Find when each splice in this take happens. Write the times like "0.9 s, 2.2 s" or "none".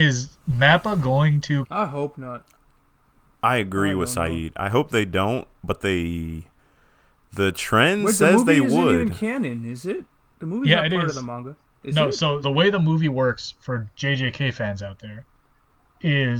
1.6 s, 12.4 s